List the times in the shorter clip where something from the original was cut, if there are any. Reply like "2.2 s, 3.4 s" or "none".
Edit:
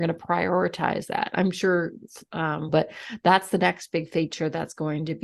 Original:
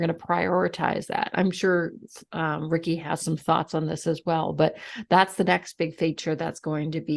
2.7 s